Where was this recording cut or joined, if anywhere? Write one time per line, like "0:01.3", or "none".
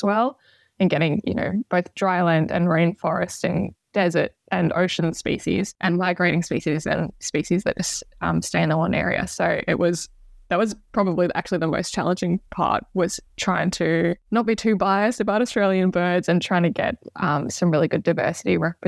none